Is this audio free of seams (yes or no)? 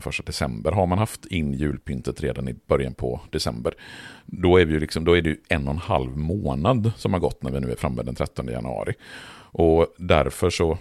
yes